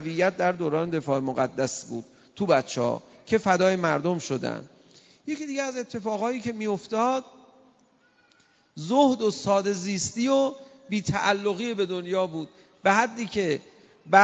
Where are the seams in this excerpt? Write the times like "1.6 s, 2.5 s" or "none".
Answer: none